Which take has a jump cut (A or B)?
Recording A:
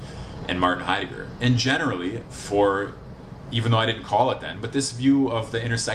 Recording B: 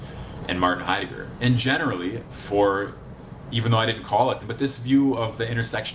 B